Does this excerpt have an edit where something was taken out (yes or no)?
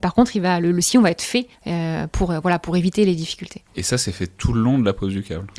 no